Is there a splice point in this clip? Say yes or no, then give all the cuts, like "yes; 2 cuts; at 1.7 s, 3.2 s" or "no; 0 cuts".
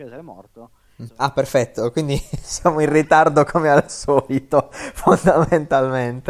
yes; 1 cut; at 1.1 s